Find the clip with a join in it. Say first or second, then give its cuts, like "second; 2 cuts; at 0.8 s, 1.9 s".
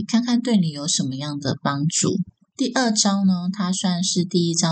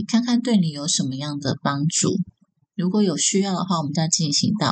first; 1 cut; at 2.5 s